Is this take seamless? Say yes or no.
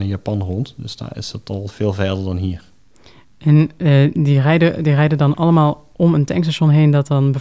no